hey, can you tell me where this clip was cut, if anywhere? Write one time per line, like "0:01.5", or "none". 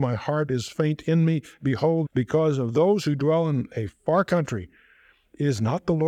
0:02.0

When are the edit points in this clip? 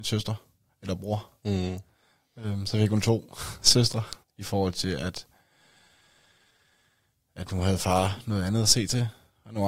0:04.2

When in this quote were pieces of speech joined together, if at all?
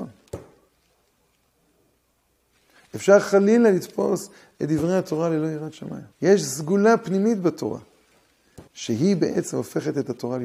0:06.1
0:08.7

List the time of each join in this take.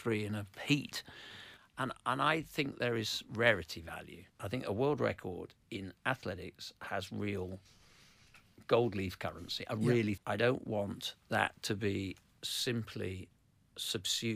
0:04.3
0:10.2

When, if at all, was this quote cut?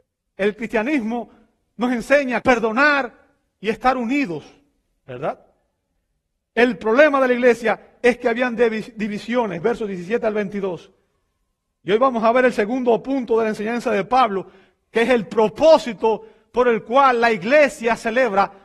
0:02.4

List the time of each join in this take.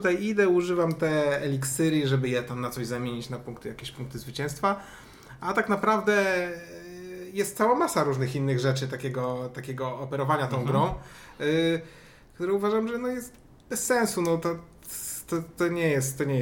none

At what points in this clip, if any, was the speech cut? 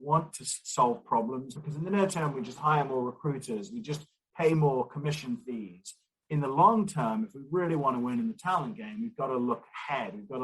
0:01.5

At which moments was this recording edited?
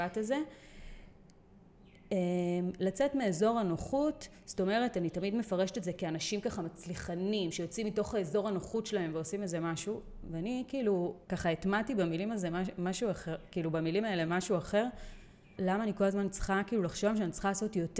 0:11.2
0:15.6

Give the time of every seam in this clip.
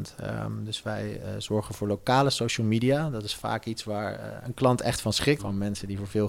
0:05.4

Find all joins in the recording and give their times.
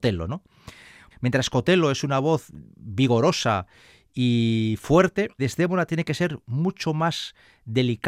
0:01.1
0:05.4

